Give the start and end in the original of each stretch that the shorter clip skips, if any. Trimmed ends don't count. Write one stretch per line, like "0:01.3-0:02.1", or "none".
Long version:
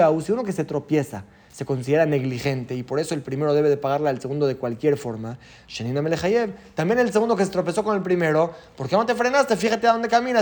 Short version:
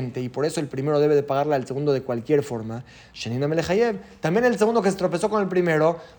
none